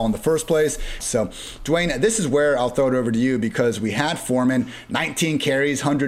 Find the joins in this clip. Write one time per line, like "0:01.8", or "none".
0:01.0